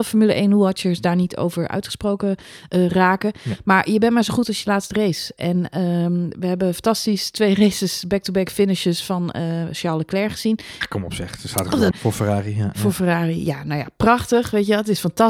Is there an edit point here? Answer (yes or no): yes